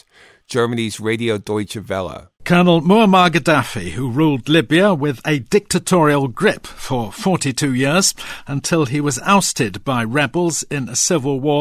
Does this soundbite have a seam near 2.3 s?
yes; 1 cut; at 2.3 s

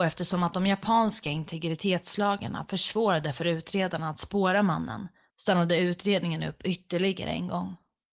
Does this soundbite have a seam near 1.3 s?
no; 1 cut; at 5.3 s

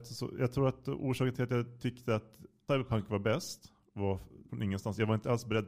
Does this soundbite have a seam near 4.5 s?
yes; 1 cut; at 4.5 s

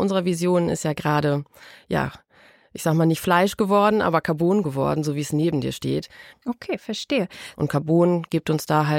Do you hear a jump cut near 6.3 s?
yes; 2 cuts; at 6.3 s, 7.5 s

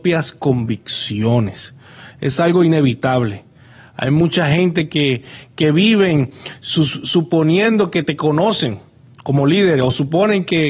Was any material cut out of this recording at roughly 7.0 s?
no; 0 cuts

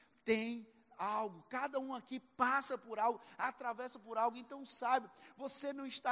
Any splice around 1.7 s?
no; 0 cuts

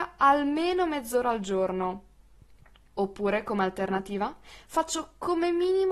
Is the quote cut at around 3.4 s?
no; 0 cuts

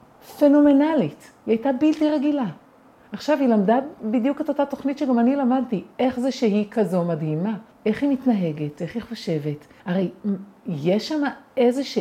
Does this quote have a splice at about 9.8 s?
yes; 2 cuts; at 7.7 s, 9.8 s

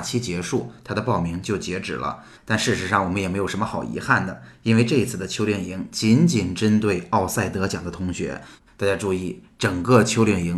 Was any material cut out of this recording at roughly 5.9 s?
no; 2 cuts; at 2.3 s, 8.7 s

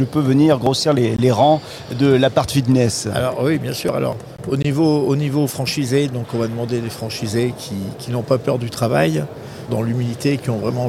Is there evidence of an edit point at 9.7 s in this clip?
yes; 1 cut; at 9.7 s

